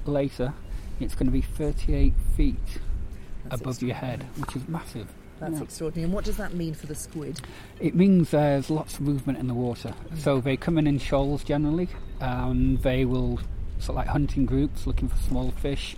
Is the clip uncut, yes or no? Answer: yes